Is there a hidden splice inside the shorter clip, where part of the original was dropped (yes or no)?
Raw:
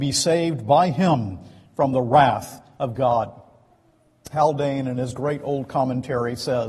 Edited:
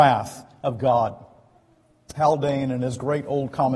no